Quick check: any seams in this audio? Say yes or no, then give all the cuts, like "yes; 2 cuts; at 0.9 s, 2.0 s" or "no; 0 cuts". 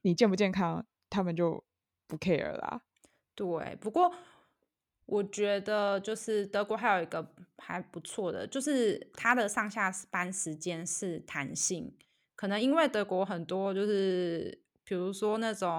no; 0 cuts